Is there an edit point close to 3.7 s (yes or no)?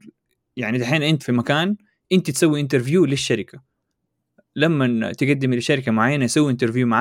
no